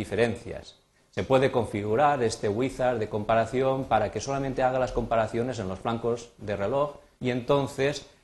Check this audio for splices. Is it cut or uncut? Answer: cut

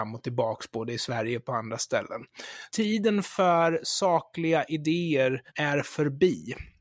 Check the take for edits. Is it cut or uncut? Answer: cut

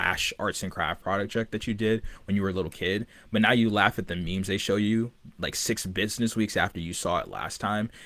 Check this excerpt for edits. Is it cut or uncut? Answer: uncut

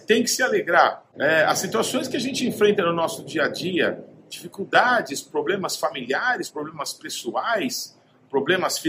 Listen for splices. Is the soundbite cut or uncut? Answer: uncut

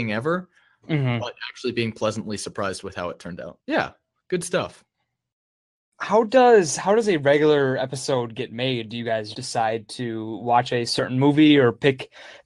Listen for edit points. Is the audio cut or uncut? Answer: cut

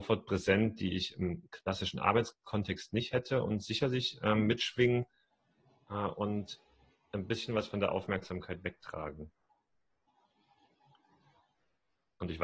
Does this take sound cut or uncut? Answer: uncut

